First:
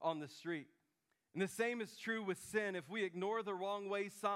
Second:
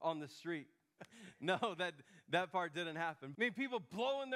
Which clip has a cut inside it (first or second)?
second